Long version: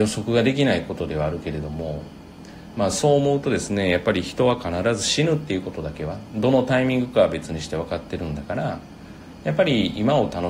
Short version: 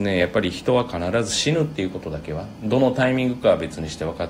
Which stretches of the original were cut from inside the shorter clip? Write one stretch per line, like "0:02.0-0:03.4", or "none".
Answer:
none